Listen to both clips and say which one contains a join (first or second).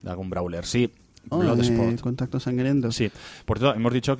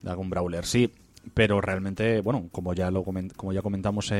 first